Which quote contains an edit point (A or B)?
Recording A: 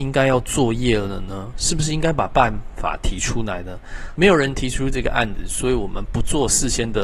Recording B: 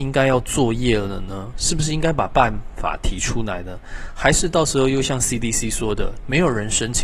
A